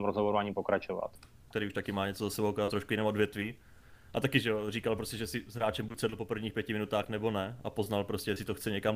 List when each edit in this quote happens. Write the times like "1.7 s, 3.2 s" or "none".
1.5 s